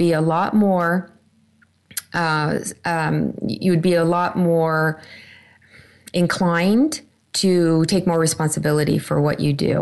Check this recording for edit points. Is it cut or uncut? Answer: uncut